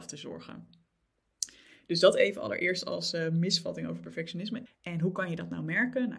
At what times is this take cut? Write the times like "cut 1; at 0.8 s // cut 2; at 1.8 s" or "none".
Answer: cut 1; at 4.7 s